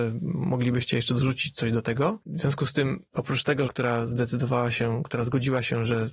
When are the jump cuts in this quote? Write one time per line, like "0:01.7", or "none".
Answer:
0:03.7